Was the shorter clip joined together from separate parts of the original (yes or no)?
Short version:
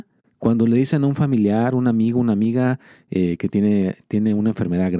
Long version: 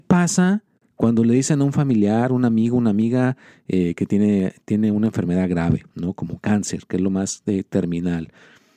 no